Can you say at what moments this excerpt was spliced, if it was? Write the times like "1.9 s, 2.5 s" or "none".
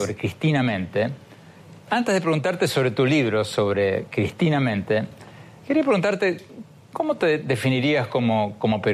none